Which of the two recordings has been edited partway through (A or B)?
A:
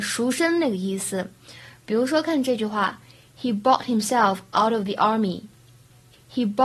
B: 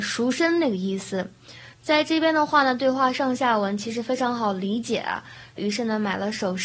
B